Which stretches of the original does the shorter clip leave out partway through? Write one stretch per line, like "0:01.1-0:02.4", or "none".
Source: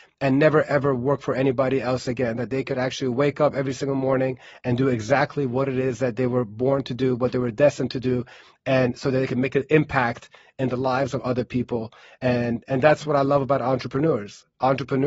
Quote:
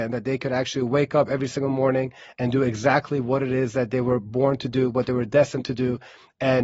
none